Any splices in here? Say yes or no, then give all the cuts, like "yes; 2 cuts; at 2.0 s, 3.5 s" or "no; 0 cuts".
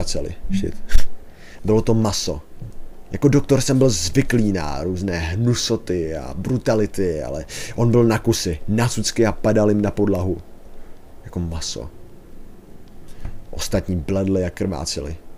yes; 1 cut; at 1.6 s